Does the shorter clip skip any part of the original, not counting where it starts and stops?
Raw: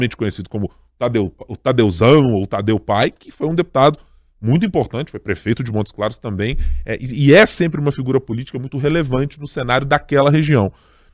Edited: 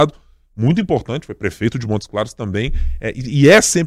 no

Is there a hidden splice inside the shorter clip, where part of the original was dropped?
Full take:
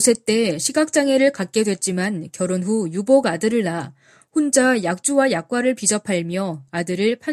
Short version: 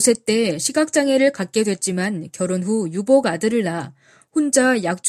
no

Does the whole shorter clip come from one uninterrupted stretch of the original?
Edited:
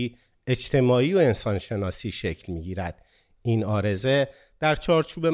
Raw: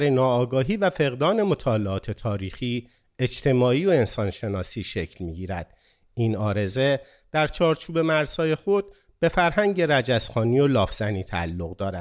yes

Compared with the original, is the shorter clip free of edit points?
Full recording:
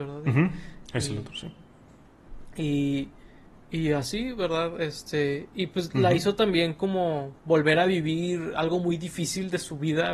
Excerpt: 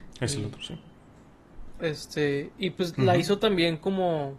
no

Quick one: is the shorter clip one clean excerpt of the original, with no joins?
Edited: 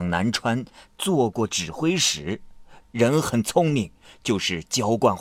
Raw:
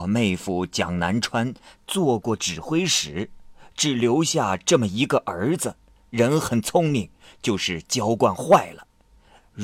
no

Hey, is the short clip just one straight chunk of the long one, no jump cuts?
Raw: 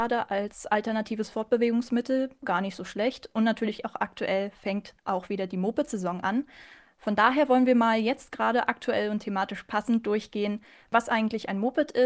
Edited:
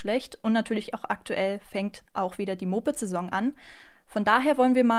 yes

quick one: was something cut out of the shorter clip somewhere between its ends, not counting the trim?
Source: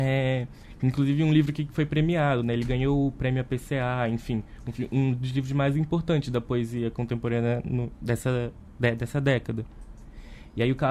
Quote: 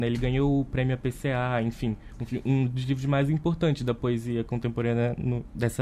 no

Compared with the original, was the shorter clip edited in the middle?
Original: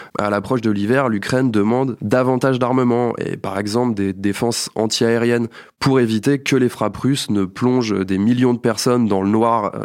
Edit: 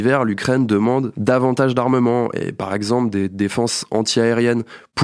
no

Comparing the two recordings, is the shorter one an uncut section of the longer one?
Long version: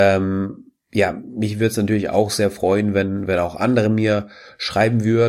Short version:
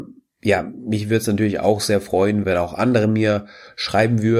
no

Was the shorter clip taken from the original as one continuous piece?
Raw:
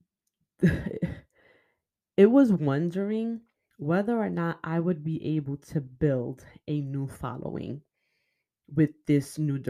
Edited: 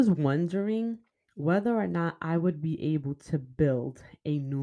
yes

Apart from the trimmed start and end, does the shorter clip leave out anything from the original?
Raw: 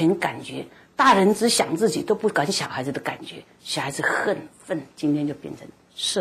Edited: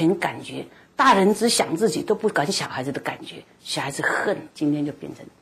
yes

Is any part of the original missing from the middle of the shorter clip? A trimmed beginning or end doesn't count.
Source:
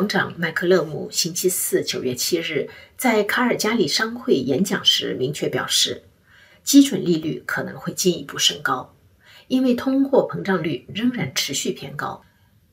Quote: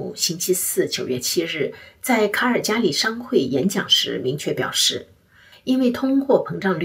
yes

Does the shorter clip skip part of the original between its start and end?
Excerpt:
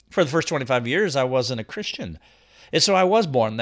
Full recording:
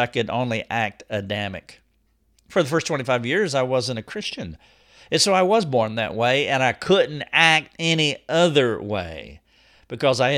no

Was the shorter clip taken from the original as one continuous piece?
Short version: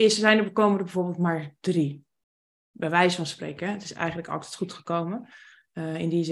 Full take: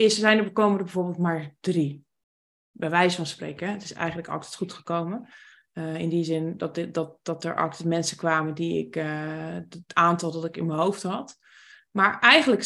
yes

